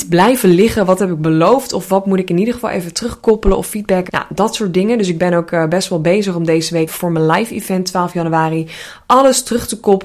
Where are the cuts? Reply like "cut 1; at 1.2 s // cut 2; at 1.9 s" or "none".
cut 1; at 4.1 s // cut 2; at 6.9 s

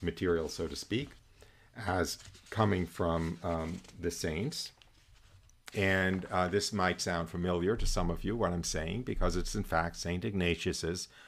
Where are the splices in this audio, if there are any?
cut 1; at 5.7 s

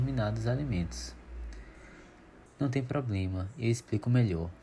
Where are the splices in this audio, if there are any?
cut 1; at 2.5 s

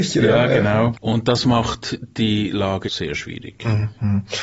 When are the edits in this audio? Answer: cut 1; at 0.9 s // cut 2; at 2.8 s

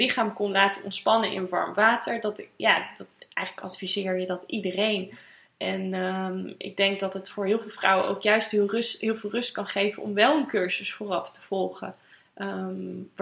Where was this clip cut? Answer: none

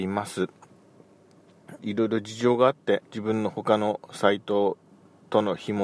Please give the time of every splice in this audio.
cut 1; at 1.8 s // cut 2; at 3.0 s

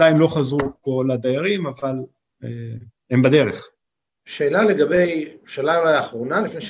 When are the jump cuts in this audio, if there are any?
none

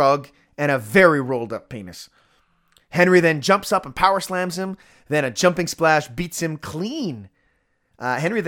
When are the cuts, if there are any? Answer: none

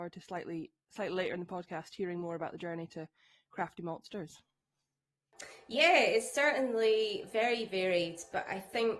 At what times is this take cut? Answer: none

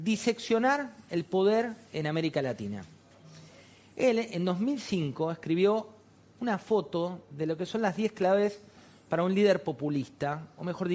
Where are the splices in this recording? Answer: none

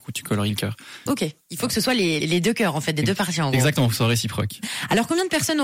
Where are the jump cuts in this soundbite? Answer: cut 1; at 1.1 s // cut 2; at 2.2 s

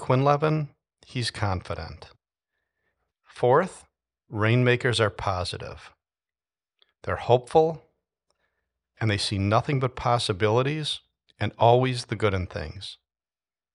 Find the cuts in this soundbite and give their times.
cut 1; at 3.1 s

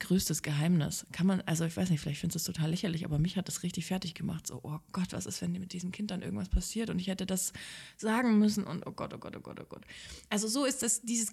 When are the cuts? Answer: none

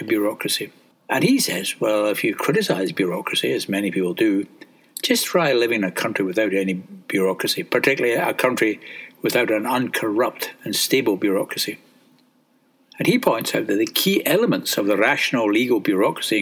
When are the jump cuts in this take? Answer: cut 1; at 0.9 s

